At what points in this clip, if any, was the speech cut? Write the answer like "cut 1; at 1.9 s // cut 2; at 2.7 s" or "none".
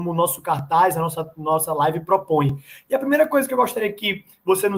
none